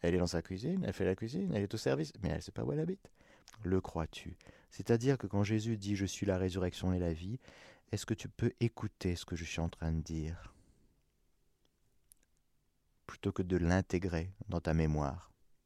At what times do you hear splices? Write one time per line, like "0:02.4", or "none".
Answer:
0:03.5